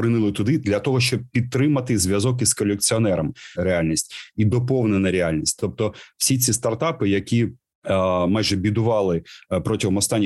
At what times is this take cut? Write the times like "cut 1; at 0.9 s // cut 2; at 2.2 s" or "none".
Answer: cut 1; at 3.6 s